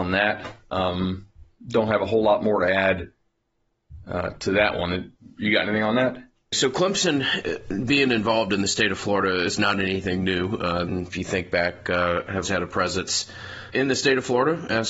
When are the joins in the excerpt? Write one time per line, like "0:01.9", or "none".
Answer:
0:10.8
0:12.4
0:13.7